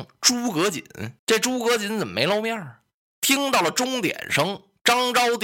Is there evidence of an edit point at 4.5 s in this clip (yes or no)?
no